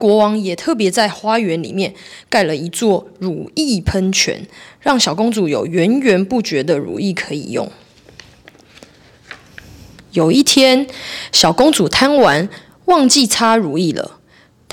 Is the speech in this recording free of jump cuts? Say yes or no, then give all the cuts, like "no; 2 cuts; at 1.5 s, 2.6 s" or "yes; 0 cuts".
yes; 0 cuts